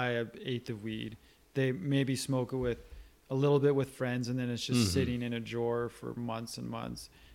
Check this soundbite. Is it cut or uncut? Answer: uncut